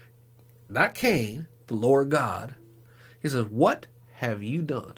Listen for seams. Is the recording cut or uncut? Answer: cut